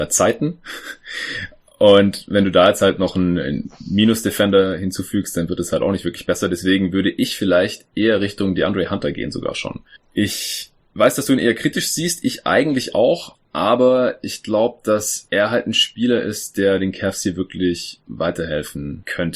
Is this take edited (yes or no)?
no